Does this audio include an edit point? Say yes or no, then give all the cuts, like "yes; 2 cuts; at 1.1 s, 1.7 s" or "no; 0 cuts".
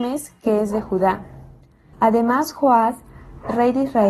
yes; 1 cut; at 1.9 s